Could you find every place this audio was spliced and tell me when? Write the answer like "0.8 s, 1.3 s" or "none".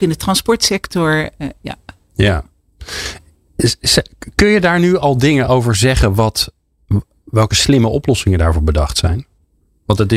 none